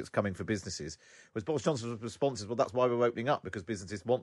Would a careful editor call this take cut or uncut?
uncut